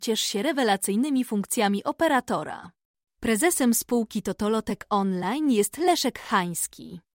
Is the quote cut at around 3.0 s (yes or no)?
yes